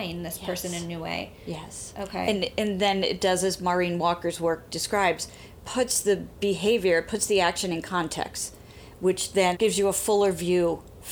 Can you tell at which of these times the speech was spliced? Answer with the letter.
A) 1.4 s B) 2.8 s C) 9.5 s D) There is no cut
C